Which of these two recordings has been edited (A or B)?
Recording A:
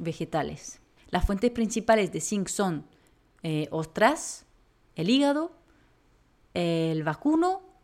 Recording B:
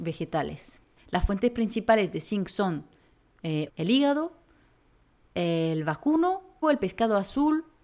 B